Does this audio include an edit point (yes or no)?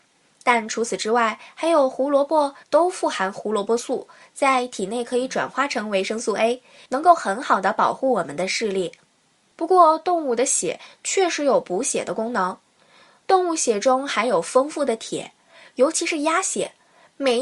yes